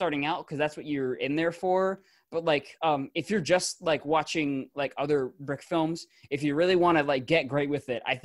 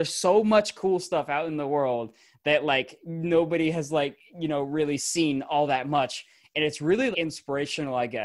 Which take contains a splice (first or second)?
second